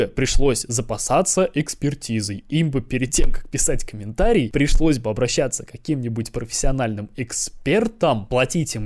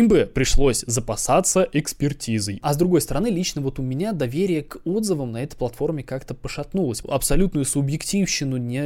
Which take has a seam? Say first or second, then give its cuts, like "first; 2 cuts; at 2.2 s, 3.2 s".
second; 2 cuts; at 2.6 s, 7.0 s